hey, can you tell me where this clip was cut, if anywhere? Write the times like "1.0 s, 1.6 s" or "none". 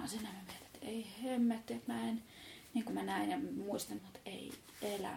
2.9 s, 4.0 s